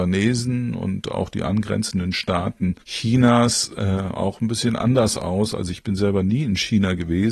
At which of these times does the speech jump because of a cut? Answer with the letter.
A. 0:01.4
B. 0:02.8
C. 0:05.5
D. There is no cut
B